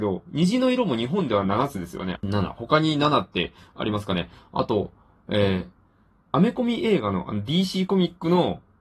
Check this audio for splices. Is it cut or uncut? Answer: cut